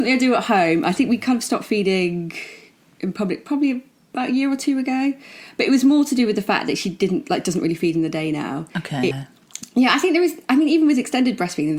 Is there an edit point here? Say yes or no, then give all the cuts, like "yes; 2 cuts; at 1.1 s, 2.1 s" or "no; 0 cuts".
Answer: yes; 1 cut; at 9.1 s